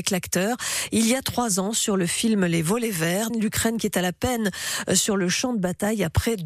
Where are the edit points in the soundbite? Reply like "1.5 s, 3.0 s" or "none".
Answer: 3.3 s

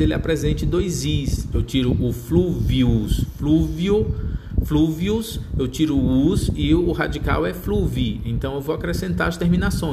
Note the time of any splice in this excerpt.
1.5 s

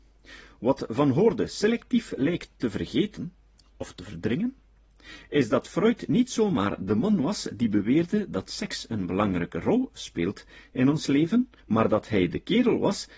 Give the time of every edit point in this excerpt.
11.6 s

